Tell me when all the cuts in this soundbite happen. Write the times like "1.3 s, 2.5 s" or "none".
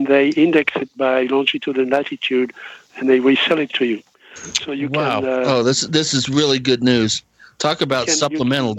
none